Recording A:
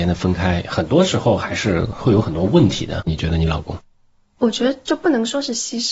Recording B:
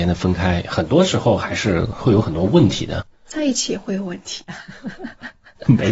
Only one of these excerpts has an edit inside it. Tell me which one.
A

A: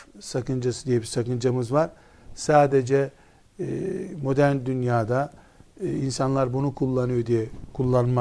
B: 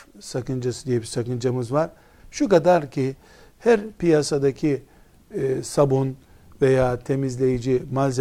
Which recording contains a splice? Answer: B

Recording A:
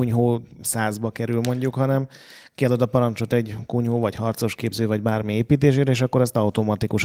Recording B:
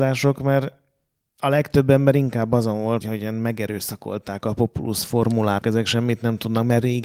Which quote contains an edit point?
B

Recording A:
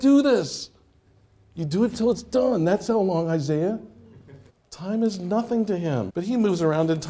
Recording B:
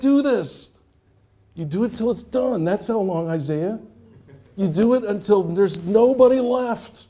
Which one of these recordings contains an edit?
A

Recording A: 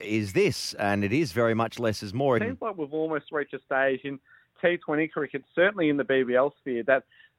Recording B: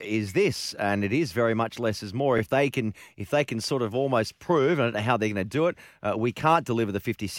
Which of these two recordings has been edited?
A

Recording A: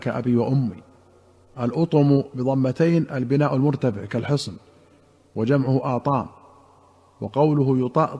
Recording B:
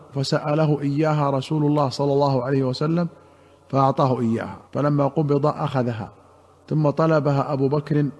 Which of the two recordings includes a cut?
B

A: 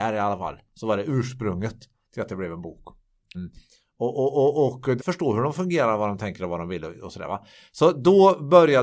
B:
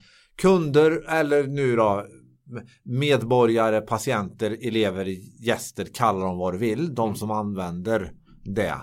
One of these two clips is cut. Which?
A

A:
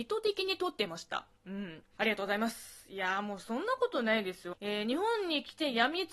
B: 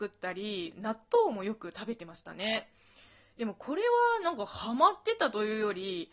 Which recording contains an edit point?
A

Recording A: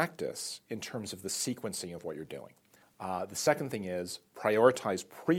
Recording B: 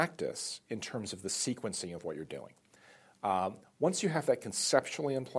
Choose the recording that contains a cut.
A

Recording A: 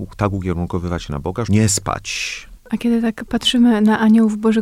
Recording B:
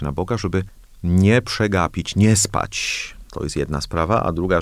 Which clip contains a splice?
A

